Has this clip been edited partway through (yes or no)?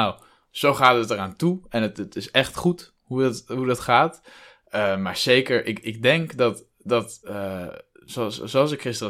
no